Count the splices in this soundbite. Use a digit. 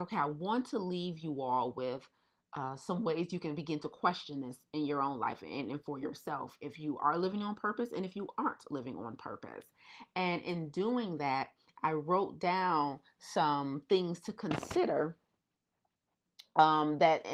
0